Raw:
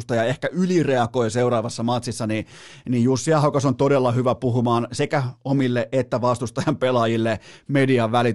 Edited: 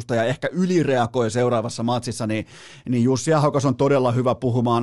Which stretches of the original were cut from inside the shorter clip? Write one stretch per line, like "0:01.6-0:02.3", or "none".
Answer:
none